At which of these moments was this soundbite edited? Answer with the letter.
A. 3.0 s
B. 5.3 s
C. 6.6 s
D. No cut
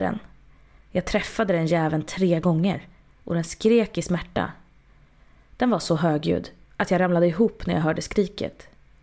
C